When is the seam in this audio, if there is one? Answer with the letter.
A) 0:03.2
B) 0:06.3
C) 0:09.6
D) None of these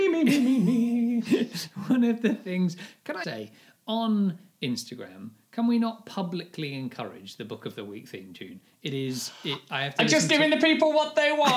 A